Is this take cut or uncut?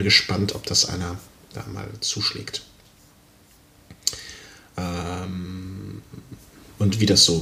uncut